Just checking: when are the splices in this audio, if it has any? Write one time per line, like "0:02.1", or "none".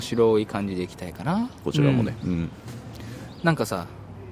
0:01.6